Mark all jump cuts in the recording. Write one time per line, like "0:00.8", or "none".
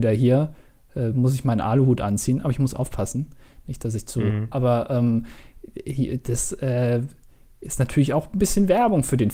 0:04.5